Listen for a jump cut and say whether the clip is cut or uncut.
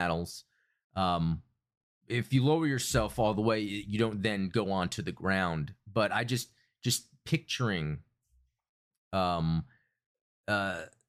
uncut